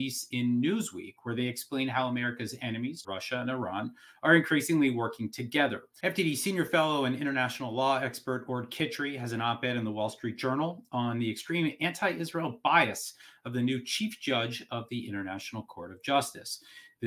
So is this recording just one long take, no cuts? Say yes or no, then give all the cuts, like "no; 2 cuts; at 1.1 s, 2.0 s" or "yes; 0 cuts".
no; 2 cuts; at 3.0 s, 6.0 s